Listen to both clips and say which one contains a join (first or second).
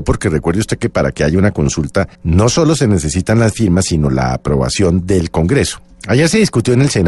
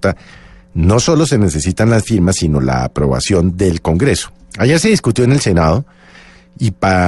first